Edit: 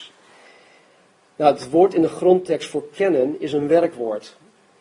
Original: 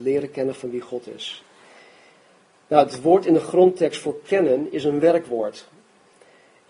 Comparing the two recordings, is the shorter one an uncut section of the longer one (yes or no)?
yes